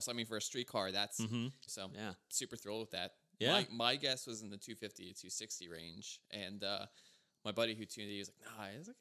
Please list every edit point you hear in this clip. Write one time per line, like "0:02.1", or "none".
0:01.7

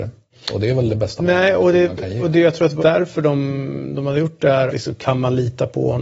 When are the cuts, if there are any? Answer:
0:02.8
0:04.7

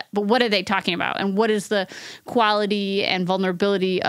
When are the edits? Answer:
none

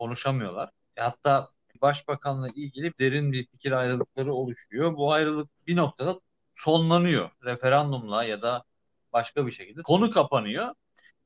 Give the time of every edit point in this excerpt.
none

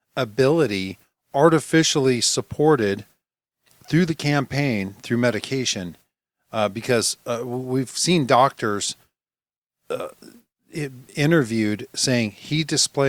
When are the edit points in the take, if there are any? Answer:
none

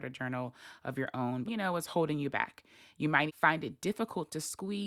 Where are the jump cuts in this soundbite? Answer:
0:01.4
0:03.3

